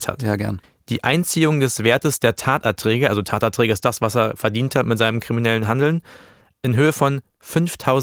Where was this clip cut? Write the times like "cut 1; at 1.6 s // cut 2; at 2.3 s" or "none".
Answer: none